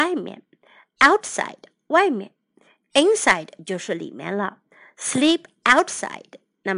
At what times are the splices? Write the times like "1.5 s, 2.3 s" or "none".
none